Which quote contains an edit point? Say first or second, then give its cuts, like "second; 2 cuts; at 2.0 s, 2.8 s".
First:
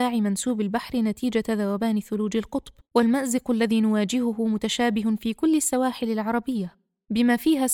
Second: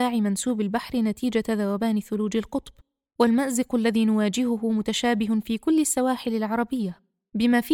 first; 1 cut; at 2.8 s